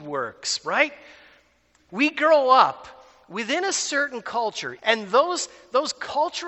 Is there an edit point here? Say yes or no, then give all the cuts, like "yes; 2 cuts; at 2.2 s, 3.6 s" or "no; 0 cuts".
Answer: yes; 2 cuts; at 1.9 s, 4.8 s